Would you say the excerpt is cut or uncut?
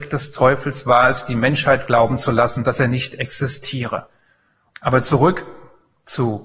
cut